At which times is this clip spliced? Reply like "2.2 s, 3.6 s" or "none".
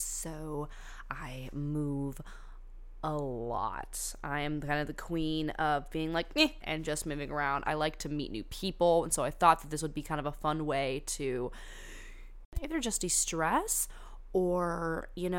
6.6 s, 7.6 s

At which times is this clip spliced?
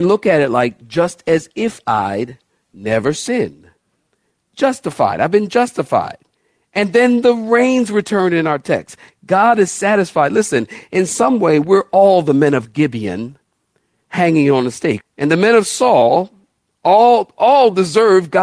15.0 s

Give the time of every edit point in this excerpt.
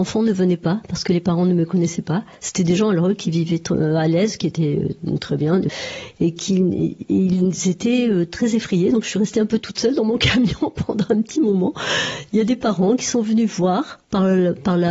none

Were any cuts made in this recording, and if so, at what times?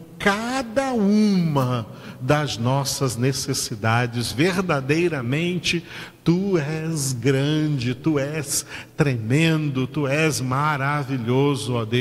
none

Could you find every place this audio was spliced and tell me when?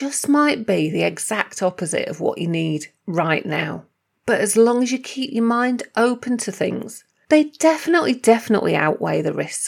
4.1 s, 7.2 s

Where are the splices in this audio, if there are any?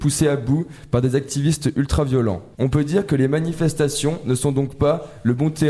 2.5 s

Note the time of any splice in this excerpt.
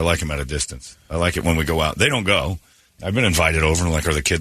2.9 s

